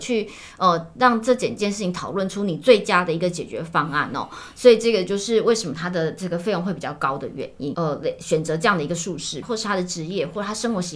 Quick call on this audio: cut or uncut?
cut